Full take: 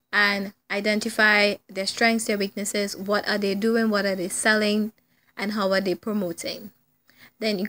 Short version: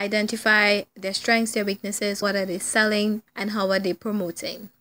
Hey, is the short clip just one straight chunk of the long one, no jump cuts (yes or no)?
no